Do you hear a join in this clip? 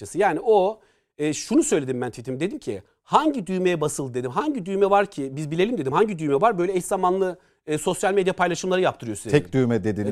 no; 0 cuts

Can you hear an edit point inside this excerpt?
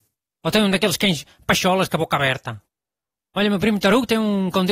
yes; 1 cut; at 1.9 s

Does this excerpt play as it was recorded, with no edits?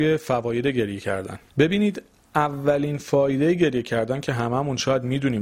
no; 1 cut; at 1.5 s

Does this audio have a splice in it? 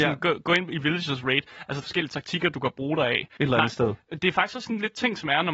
yes; 2 cuts; at 1.8 s, 3.4 s

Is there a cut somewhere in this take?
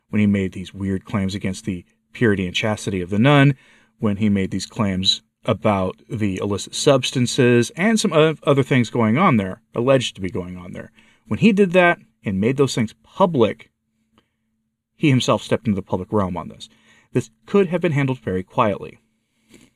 no; 0 cuts

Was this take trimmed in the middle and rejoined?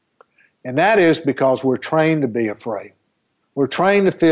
yes; 1 cut; at 3.4 s

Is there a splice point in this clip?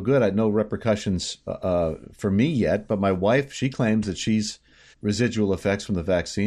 yes; 1 cut; at 4.9 s

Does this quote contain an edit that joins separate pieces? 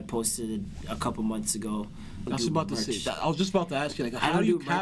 yes; 1 cut; at 2.3 s

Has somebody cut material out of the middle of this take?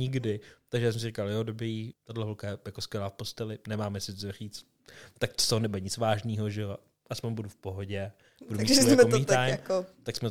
yes; 1 cut; at 1.9 s

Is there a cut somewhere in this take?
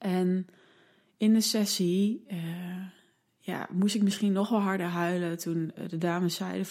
no; 0 cuts

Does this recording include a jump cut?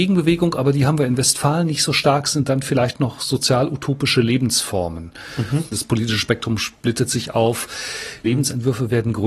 yes; 2 cuts; at 5.7 s, 8.2 s

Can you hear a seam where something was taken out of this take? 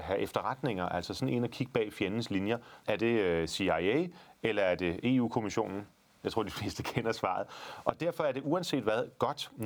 yes; 1 cut; at 2.8 s

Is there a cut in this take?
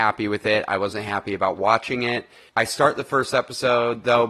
yes; 1 cut; at 2.5 s

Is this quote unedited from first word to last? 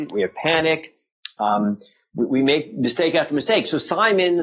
yes; 0 cuts

